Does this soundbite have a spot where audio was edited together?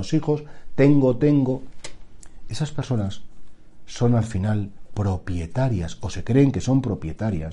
yes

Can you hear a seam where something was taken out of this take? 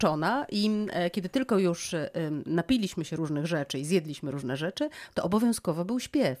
no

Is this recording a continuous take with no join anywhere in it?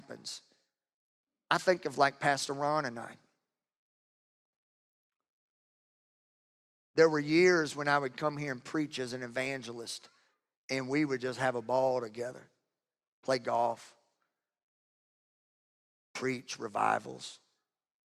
yes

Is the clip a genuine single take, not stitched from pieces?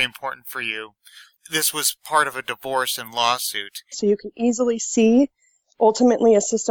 no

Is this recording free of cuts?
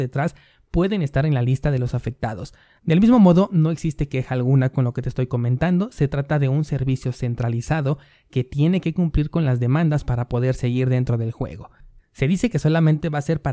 no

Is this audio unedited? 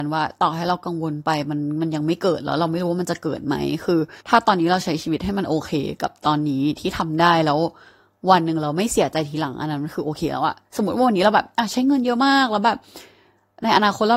no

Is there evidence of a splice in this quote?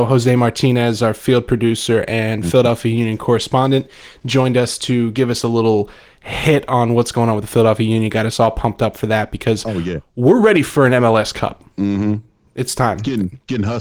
yes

